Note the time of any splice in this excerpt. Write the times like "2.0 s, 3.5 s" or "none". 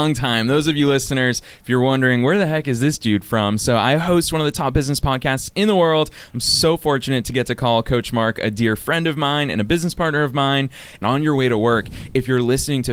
11.0 s